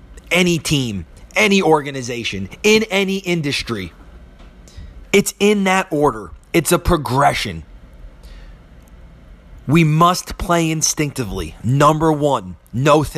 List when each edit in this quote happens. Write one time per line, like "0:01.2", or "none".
0:01.3
0:05.0